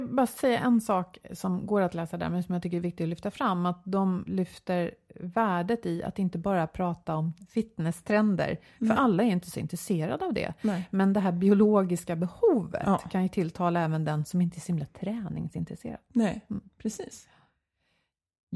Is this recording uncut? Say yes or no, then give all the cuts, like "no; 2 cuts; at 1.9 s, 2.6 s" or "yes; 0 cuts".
no; 1 cut; at 4.3 s